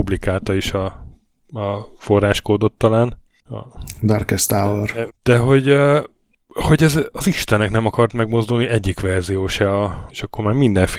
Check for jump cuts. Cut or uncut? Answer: cut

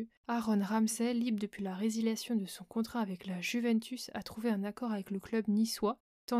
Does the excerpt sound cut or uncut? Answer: uncut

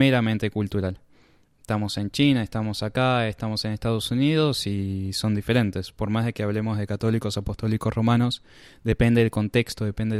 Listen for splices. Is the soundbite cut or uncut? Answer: uncut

